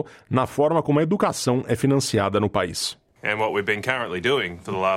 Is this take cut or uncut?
cut